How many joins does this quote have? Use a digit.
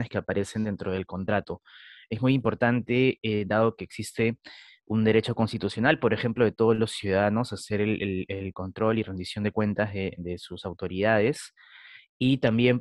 0